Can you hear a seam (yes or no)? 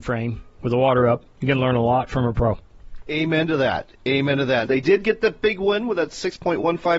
yes